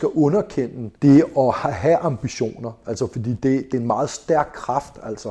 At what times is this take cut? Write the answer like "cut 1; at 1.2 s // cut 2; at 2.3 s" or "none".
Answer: cut 1; at 1.0 s